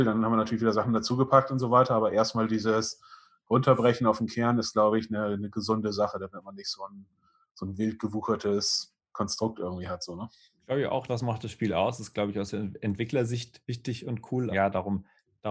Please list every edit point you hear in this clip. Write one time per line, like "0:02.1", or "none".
0:11.1
0:14.5